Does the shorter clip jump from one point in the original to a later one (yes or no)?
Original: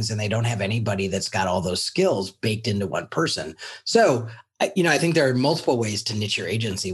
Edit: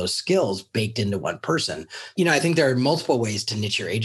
yes